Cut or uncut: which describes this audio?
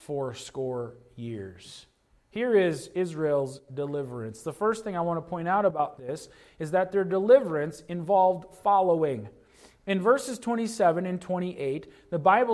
uncut